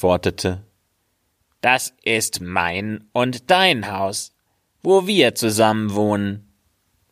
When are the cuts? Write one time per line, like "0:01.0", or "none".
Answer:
none